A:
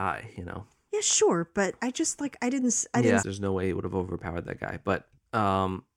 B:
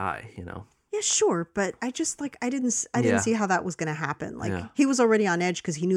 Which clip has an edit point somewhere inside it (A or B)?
A